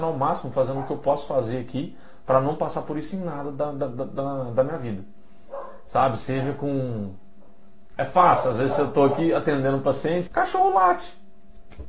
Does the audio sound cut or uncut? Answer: cut